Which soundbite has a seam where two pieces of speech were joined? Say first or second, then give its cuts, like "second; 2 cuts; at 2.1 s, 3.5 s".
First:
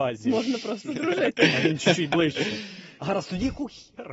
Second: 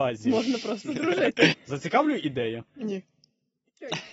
second; 1 cut; at 1.5 s